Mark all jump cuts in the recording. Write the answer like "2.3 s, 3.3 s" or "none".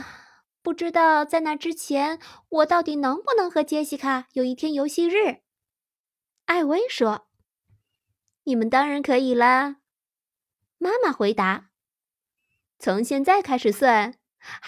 none